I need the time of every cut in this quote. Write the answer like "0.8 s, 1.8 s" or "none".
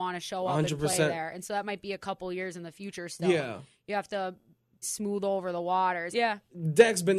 4.8 s, 6.1 s